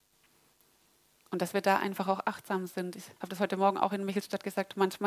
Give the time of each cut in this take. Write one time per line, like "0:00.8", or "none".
0:03.2